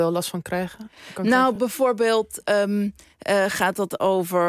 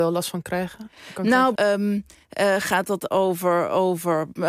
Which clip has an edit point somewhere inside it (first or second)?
second